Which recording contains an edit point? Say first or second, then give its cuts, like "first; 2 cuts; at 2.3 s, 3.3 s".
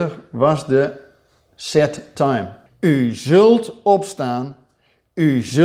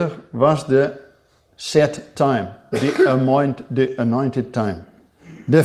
first; 1 cut; at 2.7 s